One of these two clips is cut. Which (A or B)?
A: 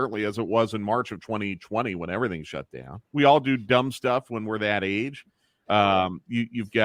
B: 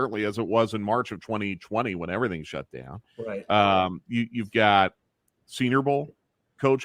A